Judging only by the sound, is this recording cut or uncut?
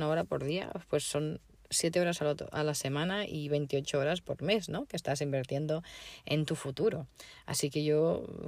uncut